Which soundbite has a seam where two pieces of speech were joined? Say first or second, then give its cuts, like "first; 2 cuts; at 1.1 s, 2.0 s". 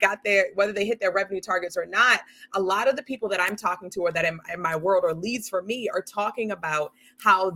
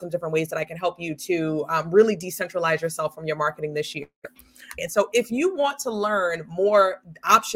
second; 1 cut; at 4.8 s